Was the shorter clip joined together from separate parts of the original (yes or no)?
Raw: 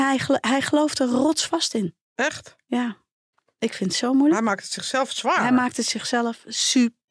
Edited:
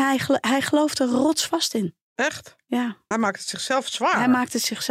yes